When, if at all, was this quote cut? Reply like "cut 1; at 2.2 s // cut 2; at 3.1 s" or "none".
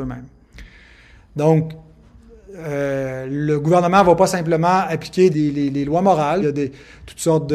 cut 1; at 5.3 s // cut 2; at 6.4 s